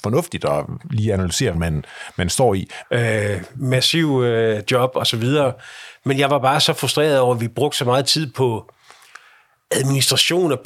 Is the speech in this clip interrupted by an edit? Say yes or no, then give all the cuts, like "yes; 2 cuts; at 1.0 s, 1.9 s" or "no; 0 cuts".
yes; 3 cuts; at 1.5 s, 2.8 s, 4.7 s